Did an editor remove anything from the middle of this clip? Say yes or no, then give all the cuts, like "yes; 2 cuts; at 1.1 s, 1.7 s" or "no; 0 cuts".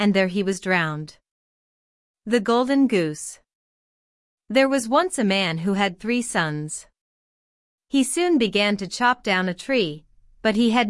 yes; 1 cut; at 7.7 s